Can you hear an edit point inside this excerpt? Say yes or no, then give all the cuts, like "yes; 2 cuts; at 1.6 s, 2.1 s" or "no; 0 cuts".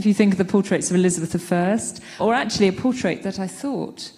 yes; 1 cut; at 2.2 s